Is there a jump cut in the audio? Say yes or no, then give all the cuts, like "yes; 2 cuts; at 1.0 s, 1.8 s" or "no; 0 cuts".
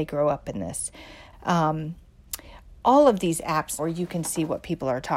yes; 2 cuts; at 1.3 s, 3.8 s